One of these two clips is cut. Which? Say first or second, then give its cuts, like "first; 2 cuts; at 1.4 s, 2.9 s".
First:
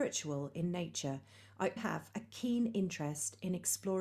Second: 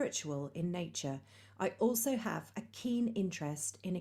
first; 1 cut; at 1.8 s